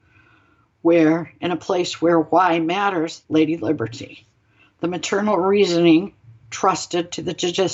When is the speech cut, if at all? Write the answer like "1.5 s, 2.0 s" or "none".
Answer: 3.2 s